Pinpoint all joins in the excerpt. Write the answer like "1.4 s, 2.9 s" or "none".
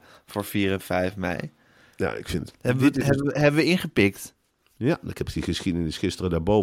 2.5 s